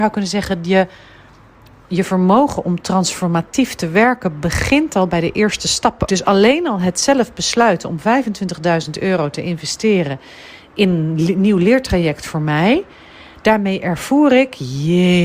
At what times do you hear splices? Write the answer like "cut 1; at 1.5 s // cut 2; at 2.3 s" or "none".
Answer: cut 1; at 6.1 s